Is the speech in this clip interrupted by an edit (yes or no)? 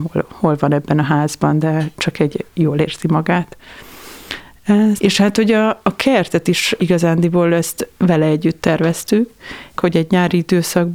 yes